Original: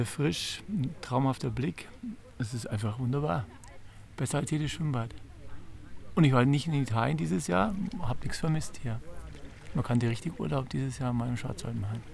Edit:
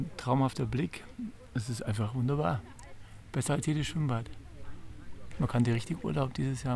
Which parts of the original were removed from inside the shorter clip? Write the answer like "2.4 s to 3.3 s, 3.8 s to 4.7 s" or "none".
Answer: 6.1 s to 9.7 s